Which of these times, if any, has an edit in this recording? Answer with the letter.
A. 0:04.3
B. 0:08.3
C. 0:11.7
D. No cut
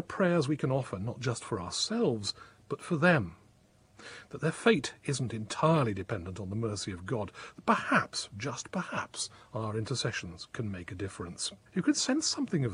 C